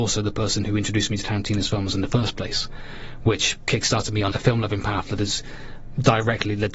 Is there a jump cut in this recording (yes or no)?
yes